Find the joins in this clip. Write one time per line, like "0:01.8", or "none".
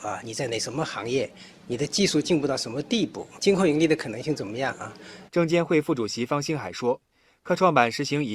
0:03.4
0:05.3